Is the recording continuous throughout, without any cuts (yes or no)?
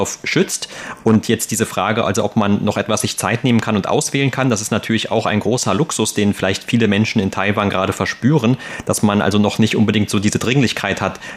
yes